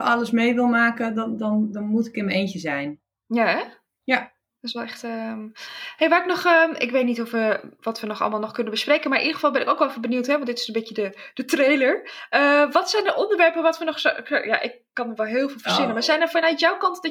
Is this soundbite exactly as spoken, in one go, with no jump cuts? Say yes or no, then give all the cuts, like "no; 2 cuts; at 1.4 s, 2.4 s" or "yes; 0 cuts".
yes; 0 cuts